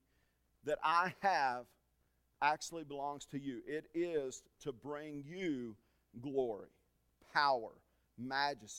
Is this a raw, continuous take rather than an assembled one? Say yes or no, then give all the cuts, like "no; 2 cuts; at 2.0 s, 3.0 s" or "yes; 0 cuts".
yes; 0 cuts